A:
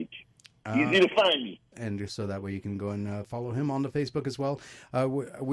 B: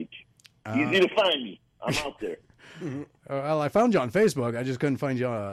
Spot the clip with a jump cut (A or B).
A